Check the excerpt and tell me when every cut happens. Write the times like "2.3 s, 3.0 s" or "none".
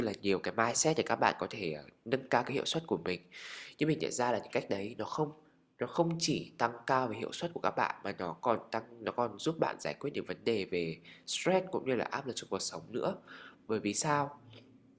none